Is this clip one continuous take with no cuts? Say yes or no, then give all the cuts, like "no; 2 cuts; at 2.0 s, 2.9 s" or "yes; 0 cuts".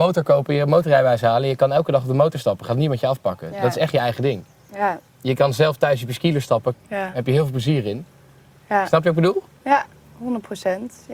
no; 2 cuts; at 5.1 s, 6.7 s